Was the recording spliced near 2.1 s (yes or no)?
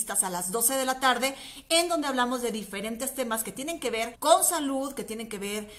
no